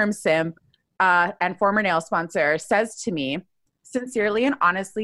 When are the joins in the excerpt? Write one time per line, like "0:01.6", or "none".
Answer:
none